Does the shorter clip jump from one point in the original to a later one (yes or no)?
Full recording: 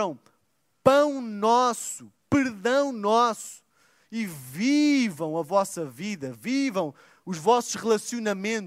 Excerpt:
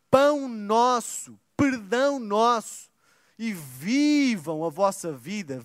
no